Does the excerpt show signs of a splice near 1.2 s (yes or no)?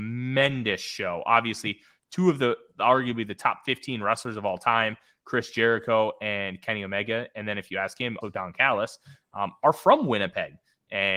no